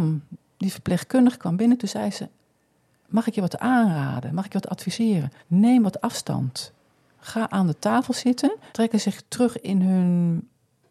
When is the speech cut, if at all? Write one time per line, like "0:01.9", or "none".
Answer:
0:05.4
0:08.7